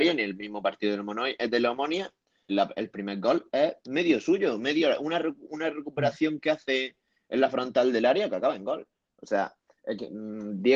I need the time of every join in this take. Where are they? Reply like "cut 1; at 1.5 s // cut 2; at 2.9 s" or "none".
cut 1; at 2.5 s